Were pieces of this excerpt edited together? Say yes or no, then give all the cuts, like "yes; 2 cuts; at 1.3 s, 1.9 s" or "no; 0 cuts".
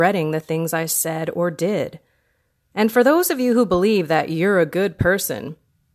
yes; 1 cut; at 2.7 s